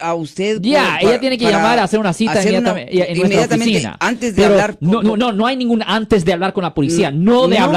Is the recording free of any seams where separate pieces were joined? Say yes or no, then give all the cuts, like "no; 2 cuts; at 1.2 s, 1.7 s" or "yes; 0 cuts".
yes; 0 cuts